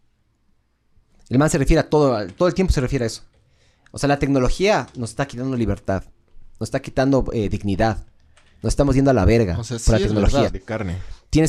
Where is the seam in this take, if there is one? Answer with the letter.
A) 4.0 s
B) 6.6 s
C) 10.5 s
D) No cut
C